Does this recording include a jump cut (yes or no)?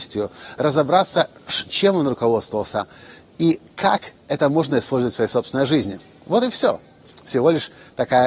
no